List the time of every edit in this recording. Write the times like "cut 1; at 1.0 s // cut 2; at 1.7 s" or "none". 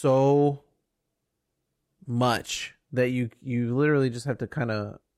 none